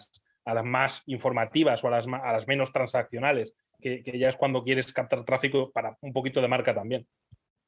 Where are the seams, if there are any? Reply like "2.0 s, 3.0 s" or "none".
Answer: 3.8 s